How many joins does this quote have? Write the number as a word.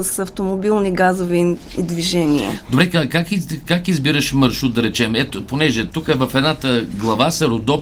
zero